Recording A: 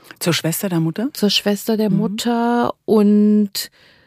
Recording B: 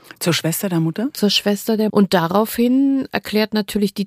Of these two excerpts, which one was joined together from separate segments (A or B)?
B